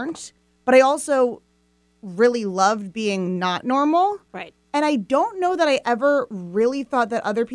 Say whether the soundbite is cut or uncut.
uncut